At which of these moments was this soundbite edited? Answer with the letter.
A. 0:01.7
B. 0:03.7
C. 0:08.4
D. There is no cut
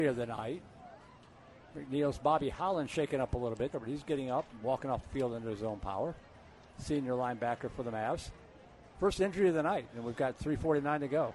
B